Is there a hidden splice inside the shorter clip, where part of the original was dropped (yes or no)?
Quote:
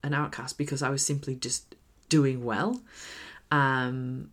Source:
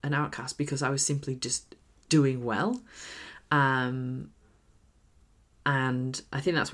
no